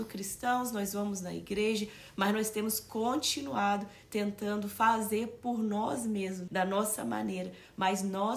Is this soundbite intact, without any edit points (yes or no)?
no